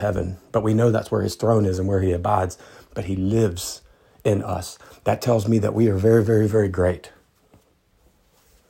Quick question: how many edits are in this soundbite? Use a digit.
0